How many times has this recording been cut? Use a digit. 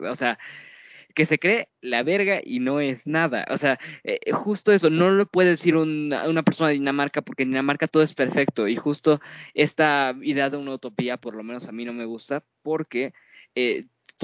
0